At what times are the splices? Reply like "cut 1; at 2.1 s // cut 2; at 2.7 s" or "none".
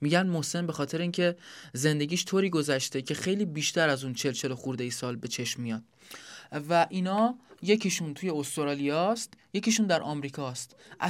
none

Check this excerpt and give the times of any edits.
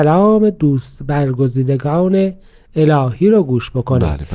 none

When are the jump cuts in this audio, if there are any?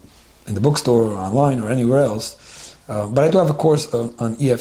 none

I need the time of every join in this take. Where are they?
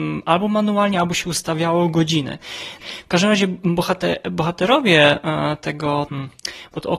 cut 1; at 2.8 s // cut 2; at 6.1 s

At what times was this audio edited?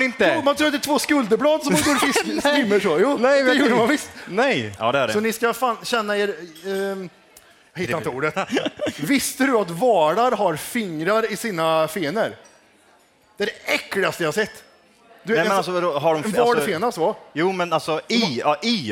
cut 1; at 4.8 s // cut 2; at 8.3 s

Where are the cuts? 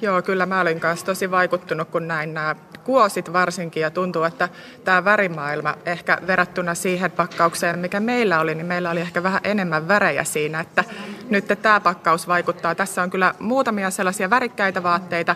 none

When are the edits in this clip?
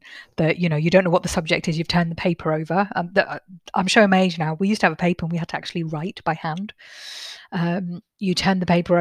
none

